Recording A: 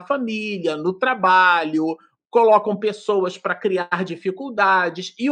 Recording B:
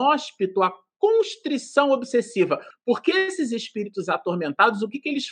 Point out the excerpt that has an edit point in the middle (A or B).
B